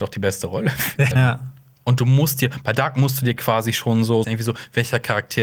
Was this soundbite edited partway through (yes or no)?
yes